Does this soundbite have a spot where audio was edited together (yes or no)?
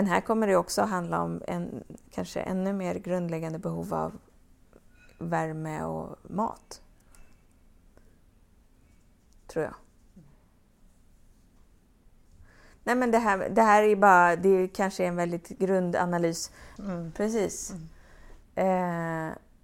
yes